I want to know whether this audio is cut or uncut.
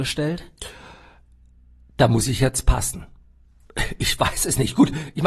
uncut